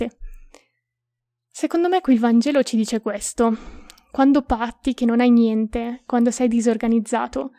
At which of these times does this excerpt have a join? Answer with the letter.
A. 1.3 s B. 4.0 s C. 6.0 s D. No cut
D